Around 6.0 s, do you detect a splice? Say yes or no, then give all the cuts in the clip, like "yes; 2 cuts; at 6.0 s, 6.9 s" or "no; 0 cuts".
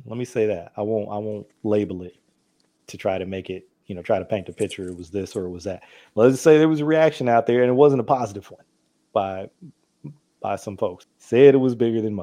no; 2 cuts; at 9.1 s, 11.0 s